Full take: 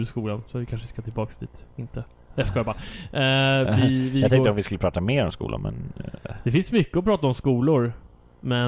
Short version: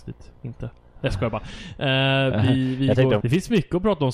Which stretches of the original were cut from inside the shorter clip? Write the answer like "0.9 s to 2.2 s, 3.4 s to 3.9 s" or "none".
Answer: 4.5 s to 6.4 s